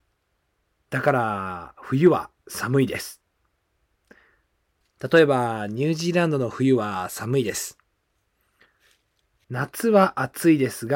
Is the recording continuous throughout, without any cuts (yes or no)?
no